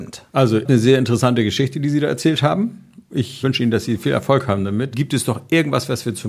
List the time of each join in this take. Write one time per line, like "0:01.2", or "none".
0:03.4
0:04.9